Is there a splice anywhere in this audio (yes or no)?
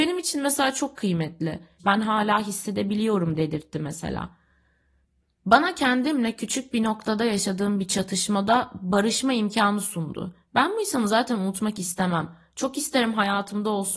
yes